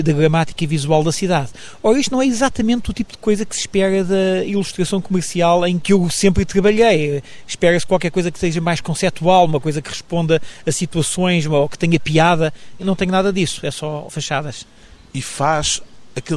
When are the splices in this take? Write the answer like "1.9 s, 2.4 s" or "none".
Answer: none